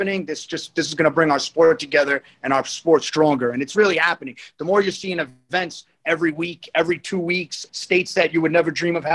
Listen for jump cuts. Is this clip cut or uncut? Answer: cut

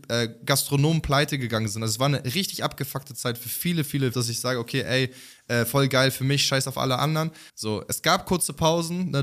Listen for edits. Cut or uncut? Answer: cut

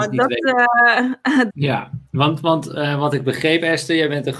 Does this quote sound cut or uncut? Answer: cut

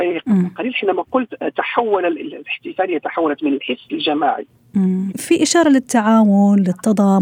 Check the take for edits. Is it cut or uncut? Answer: cut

